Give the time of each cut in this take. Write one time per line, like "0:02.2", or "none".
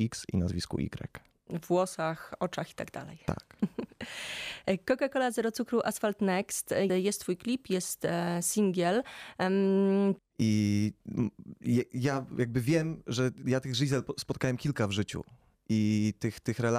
0:06.9
0:10.2